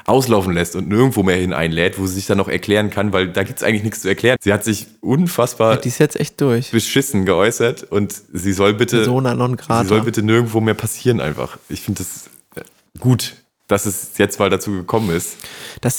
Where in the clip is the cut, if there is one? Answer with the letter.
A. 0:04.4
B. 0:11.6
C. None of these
A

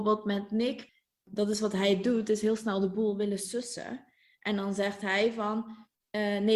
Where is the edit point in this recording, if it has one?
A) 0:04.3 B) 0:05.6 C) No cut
A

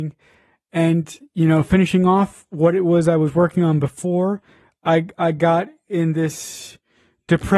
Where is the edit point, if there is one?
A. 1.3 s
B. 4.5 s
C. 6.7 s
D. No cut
D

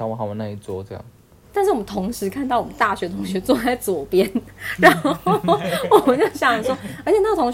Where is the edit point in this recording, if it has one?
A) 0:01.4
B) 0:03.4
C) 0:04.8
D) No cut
A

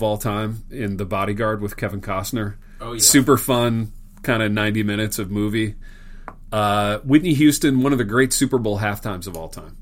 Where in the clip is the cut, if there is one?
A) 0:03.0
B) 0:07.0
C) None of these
C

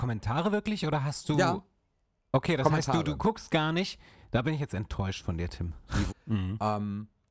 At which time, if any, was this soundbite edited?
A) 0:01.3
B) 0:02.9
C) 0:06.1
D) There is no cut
C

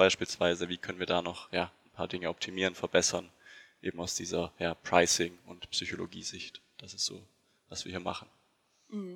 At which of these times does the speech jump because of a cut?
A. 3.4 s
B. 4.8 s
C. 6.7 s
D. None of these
D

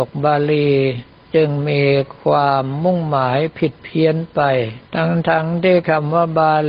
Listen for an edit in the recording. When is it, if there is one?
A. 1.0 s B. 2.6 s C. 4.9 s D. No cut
C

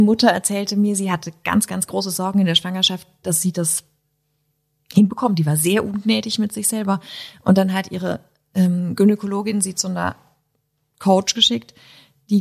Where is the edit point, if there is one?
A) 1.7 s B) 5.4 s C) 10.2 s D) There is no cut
A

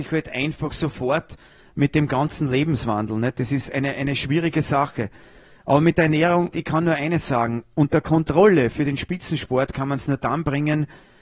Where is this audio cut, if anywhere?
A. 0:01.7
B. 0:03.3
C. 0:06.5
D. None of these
C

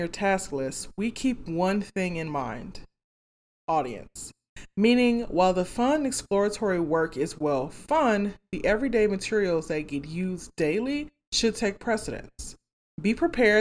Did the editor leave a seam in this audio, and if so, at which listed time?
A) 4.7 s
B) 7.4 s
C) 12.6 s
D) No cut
D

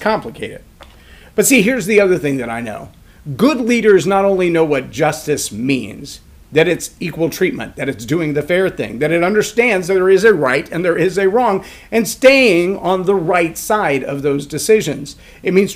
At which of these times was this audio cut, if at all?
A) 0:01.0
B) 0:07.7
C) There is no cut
C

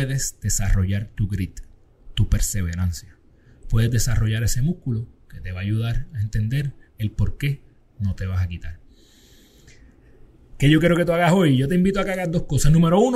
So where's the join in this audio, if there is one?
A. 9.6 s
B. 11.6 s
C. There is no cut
C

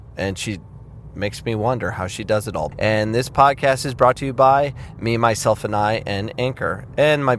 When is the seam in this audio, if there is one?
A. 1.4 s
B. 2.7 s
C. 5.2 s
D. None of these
B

